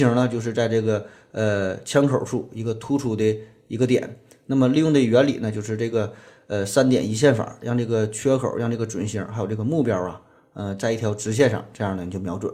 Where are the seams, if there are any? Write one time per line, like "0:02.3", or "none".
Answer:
none